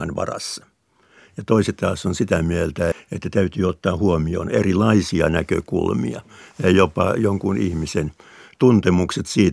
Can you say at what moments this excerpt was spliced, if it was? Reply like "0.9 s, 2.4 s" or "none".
2.9 s